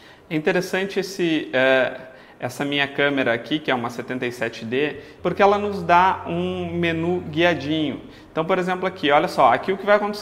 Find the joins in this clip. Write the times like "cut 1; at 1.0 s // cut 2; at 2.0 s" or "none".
cut 1; at 5.2 s